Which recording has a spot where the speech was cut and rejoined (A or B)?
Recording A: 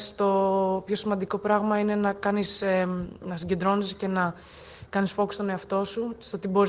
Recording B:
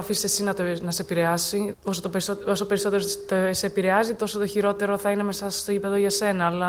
B